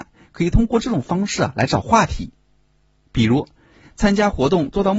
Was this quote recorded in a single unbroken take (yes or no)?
yes